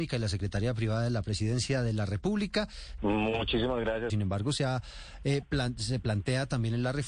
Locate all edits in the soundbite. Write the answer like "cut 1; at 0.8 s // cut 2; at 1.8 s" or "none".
cut 1; at 3.0 s // cut 2; at 4.1 s

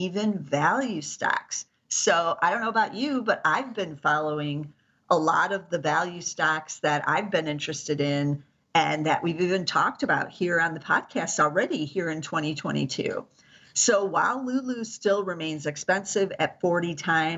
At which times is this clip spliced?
none

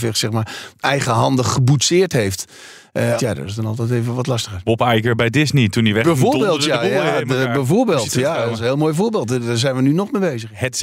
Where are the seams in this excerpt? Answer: cut 1; at 3.2 s

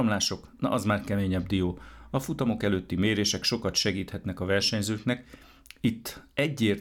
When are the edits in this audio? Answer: none

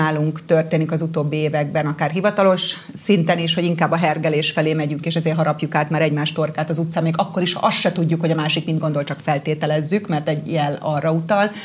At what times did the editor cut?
none

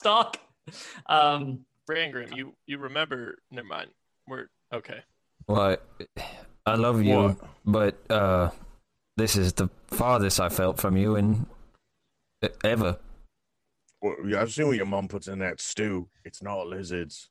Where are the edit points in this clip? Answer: cut 1; at 3.4 s

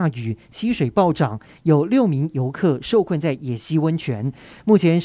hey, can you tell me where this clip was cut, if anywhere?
none

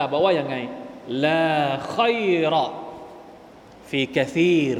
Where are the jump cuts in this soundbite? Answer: none

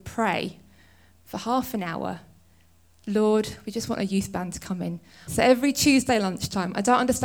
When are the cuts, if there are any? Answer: cut 1; at 5.3 s

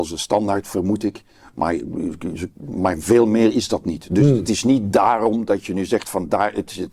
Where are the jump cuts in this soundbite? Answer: none

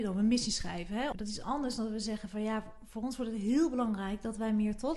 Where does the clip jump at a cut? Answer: cut 1; at 1.1 s

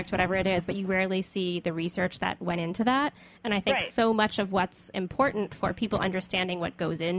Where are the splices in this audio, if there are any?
none

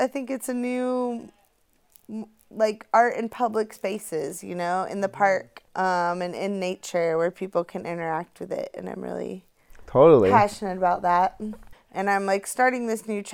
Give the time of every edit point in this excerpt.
cut 1; at 5.7 s // cut 2; at 11.7 s

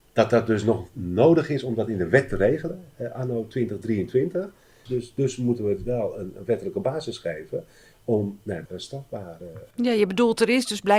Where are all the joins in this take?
cut 1; at 4.9 s // cut 2; at 8.7 s

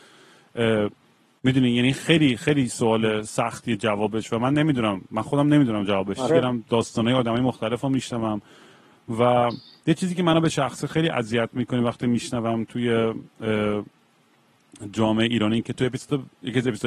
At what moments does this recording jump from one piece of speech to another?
cut 1; at 6.3 s

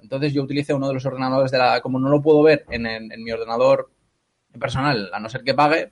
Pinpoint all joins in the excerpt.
none

